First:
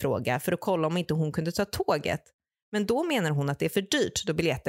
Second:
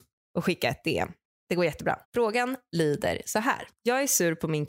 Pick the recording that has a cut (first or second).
second